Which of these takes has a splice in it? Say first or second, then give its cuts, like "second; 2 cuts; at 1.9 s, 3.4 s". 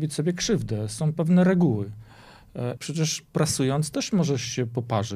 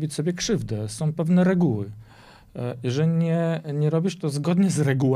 first; 1 cut; at 2.8 s